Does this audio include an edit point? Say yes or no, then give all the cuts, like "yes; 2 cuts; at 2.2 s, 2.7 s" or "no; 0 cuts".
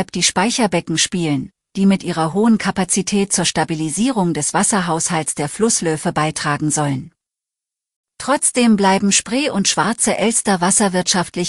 yes; 1 cut; at 8.1 s